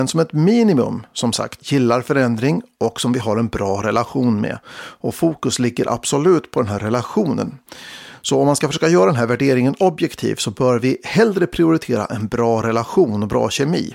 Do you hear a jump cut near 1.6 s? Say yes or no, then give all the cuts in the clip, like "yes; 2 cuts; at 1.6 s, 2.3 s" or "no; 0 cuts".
yes; 1 cut; at 1.6 s